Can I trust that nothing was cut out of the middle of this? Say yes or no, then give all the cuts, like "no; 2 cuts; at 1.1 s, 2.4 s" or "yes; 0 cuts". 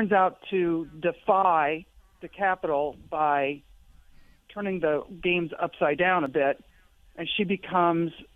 yes; 0 cuts